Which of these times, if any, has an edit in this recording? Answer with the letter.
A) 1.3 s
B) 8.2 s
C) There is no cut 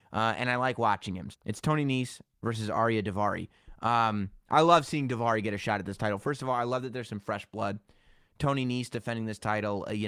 A